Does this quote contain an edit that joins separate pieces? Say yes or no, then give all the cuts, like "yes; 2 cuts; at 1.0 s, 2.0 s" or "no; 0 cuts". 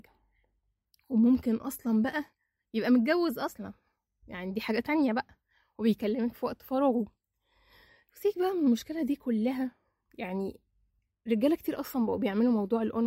no; 0 cuts